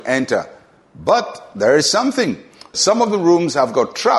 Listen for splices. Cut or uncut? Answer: cut